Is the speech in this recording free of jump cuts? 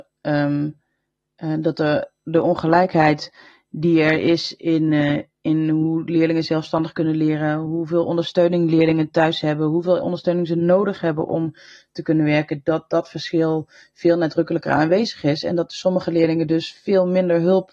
yes; 0 cuts

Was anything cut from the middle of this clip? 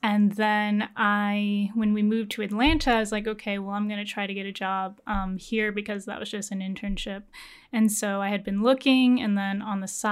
no; 0 cuts

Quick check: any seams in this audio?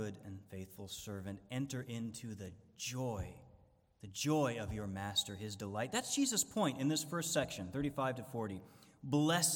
no; 0 cuts

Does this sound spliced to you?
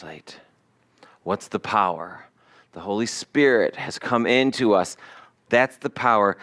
no; 0 cuts

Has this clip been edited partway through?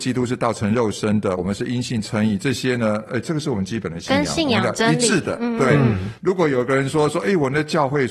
no; 0 cuts

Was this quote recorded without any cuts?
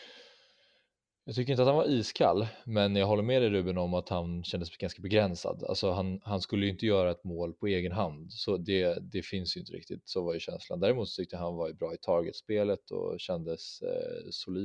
yes; 0 cuts

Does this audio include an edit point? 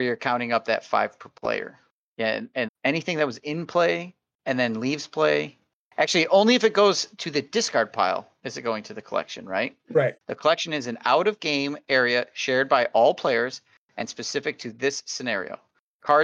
yes; 2 cuts; at 2.7 s, 10.2 s

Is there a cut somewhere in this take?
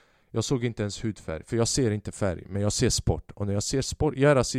no; 0 cuts

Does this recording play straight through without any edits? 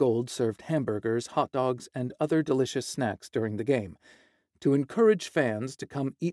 yes; 0 cuts

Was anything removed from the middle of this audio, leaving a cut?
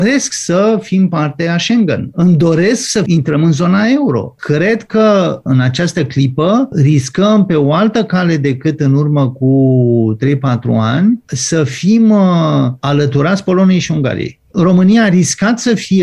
yes; 2 cuts; at 2.1 s, 4.3 s

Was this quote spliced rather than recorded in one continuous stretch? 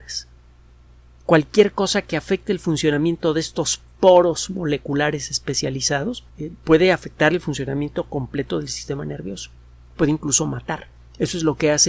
yes; 1 cut; at 6.3 s

